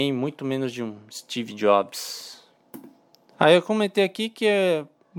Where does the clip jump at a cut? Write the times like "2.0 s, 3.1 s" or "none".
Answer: 3.3 s